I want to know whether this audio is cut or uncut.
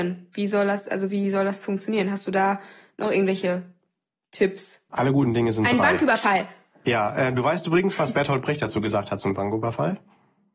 cut